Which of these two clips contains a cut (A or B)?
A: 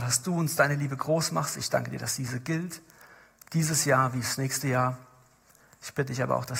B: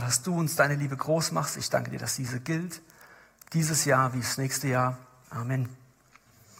B